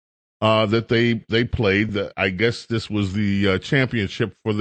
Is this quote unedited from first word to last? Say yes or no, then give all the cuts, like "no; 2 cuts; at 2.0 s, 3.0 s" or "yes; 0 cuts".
yes; 0 cuts